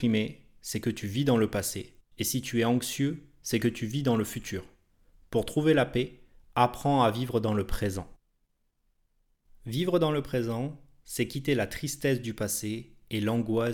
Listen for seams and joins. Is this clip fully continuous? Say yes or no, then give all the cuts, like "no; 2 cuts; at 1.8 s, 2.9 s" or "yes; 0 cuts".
yes; 0 cuts